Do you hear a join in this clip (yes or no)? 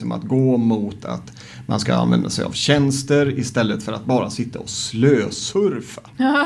no